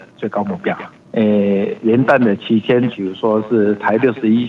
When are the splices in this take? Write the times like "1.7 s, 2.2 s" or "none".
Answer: 1.0 s, 2.9 s